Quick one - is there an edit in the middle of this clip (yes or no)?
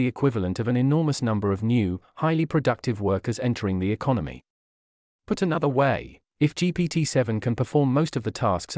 no